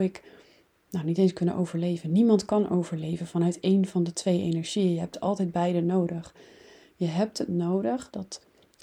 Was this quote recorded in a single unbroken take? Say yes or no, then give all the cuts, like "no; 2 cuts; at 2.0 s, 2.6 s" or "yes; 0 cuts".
yes; 0 cuts